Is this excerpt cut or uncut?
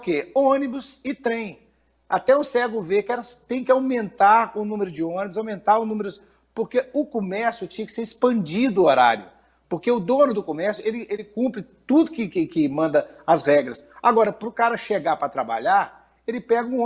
uncut